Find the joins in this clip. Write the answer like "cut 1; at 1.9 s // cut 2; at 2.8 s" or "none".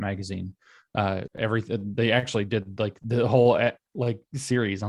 cut 1; at 1.3 s